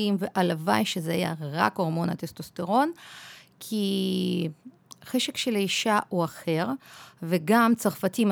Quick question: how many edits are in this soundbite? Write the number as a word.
zero